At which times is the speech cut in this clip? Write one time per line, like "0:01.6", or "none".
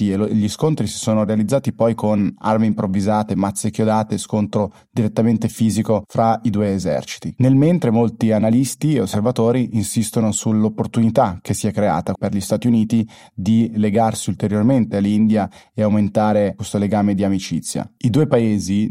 0:12.2
0:18.0